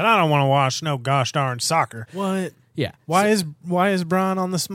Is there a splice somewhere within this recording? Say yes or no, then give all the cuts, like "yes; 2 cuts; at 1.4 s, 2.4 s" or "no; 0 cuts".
yes; 1 cut; at 2.1 s